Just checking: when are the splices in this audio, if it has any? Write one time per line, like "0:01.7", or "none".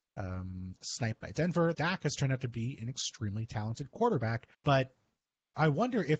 0:01.7
0:04.5